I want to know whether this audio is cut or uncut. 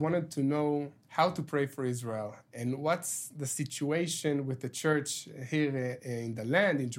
cut